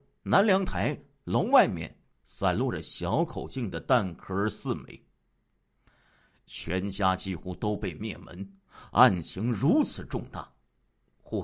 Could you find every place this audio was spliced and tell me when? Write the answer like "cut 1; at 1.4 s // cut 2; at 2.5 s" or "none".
none